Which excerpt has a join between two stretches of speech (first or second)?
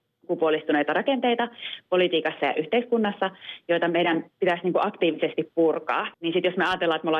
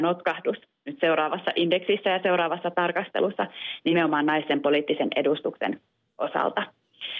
first